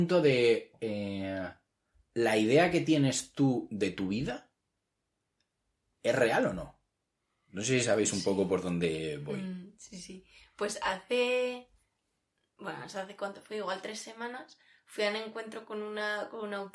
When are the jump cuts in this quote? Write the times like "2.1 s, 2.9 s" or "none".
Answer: 7.5 s